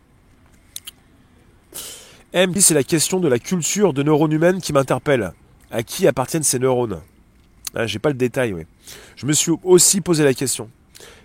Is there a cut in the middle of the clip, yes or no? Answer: yes